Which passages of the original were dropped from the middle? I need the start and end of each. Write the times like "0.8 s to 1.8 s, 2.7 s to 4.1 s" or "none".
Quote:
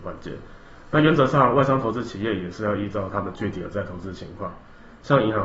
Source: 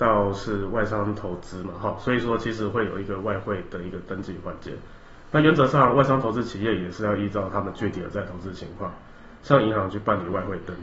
none